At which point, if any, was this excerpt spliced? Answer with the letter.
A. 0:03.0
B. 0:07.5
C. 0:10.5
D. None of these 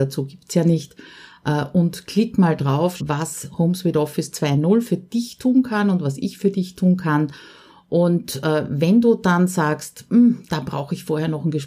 A